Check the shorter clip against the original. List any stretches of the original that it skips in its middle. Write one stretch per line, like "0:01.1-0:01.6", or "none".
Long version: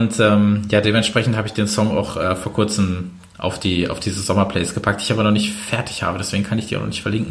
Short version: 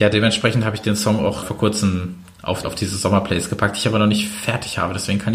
0:02.1-0:02.4
0:03.6-0:03.9